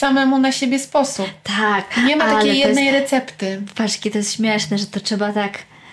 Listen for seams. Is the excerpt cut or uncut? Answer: uncut